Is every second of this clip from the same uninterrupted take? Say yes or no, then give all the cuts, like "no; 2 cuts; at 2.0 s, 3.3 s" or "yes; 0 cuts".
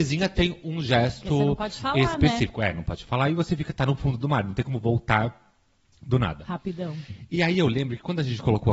yes; 0 cuts